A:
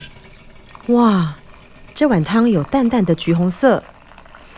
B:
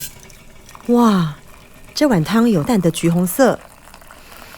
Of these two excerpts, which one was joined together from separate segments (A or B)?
B